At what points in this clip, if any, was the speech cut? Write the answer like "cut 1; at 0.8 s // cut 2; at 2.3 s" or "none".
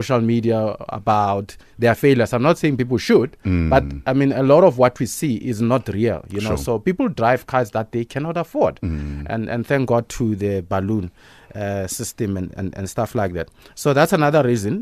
none